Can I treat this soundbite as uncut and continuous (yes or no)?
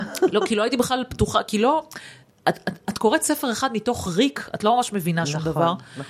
yes